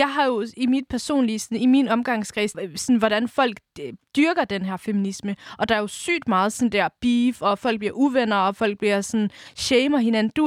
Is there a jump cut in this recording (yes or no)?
yes